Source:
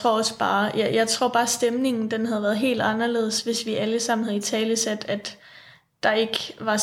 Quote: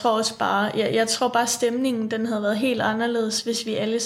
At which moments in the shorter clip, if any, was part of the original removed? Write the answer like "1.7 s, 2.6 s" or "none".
none